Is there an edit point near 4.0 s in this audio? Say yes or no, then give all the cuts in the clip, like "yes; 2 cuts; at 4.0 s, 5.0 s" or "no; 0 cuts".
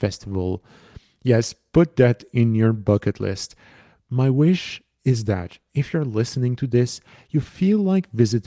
yes; 1 cut; at 4.0 s